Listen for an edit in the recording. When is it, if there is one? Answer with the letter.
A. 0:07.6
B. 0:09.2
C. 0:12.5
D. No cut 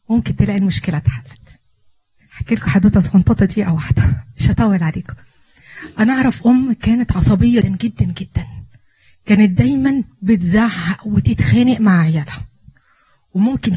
A